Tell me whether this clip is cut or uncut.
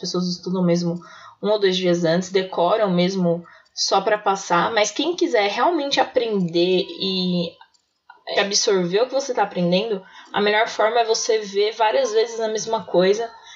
cut